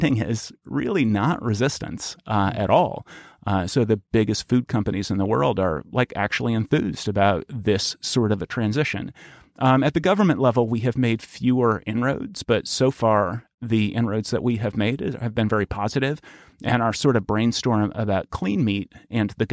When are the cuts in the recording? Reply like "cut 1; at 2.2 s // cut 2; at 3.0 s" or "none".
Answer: none